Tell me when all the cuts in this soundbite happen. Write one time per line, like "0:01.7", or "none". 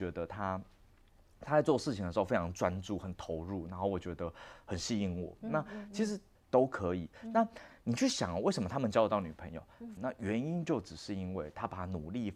0:06.4
0:10.0